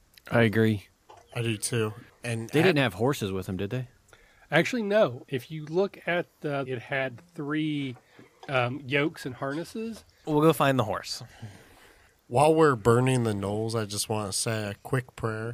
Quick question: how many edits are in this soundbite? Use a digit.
2